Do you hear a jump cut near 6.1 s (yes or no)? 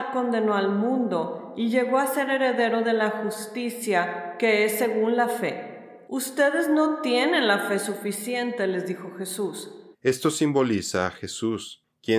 yes